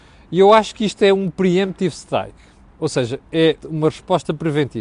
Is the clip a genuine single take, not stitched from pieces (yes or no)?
no